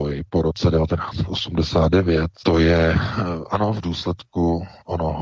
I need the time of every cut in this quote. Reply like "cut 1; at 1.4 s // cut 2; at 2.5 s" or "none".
cut 1; at 2.4 s

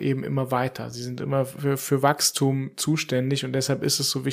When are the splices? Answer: none

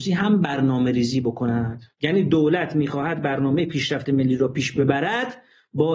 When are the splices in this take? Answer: cut 1; at 1.9 s

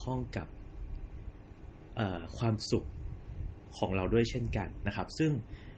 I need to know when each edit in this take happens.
none

